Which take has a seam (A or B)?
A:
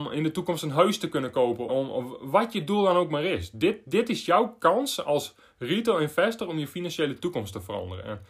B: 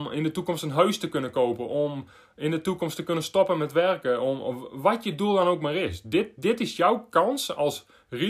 A